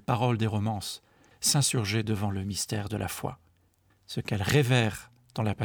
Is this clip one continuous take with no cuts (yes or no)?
no